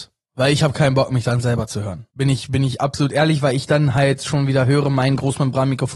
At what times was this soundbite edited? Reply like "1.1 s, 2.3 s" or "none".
2.1 s